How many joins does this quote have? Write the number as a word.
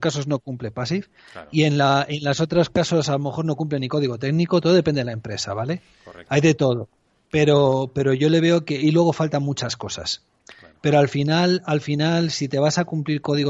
zero